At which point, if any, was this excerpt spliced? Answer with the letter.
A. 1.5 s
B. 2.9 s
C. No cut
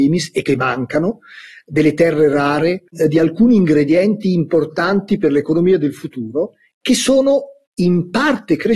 B